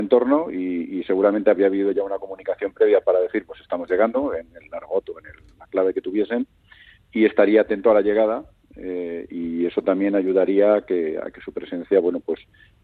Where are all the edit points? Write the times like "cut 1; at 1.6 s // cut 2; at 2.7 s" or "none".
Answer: none